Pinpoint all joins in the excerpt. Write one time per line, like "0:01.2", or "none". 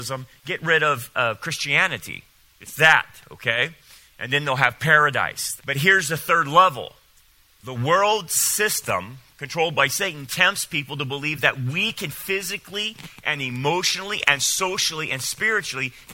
0:05.6